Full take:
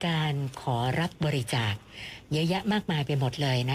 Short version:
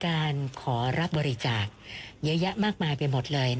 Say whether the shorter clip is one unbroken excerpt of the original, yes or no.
no